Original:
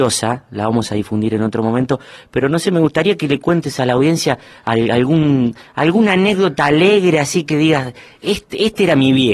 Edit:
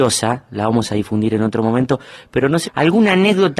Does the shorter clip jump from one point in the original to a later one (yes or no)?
yes